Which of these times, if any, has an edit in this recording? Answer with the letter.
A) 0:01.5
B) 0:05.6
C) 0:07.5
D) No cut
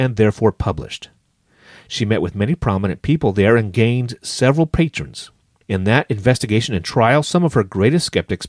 B